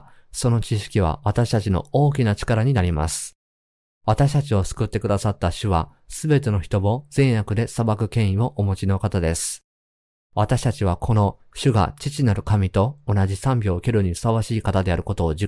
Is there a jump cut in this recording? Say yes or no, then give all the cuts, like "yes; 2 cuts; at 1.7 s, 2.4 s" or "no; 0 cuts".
no; 0 cuts